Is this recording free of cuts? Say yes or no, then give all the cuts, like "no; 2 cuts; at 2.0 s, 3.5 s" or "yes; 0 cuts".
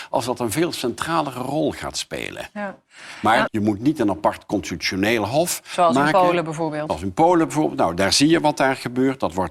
no; 1 cut; at 3.5 s